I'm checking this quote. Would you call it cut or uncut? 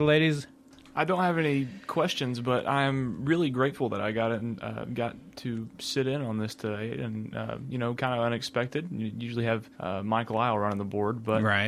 cut